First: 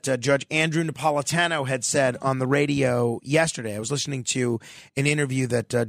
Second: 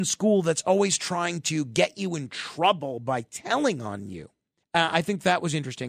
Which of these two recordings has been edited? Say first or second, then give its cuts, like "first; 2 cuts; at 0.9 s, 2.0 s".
second; 1 cut; at 4.6 s